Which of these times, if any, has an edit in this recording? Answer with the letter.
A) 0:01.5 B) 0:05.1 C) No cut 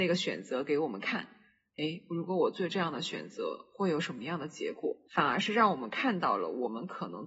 C